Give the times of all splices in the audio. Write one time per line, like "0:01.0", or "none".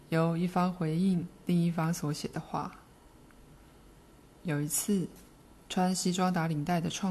none

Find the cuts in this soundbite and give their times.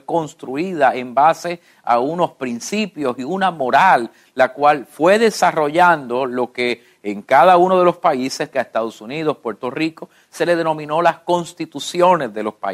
0:08.5

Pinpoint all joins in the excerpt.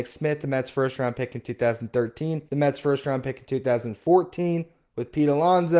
0:02.5

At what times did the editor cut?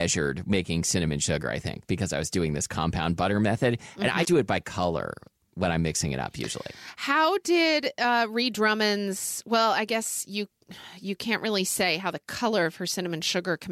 0:04.2

